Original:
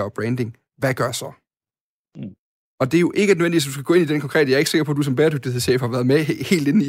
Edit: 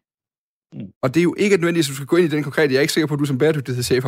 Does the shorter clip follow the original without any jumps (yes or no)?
no